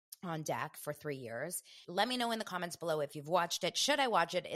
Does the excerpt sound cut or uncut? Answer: cut